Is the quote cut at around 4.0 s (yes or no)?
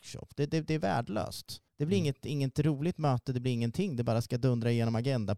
no